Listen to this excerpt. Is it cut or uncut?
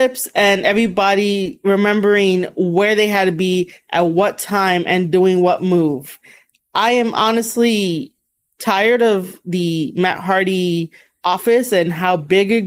uncut